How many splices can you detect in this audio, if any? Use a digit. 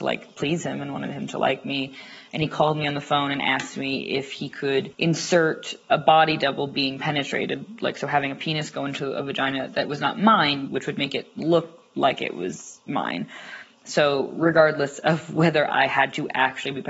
2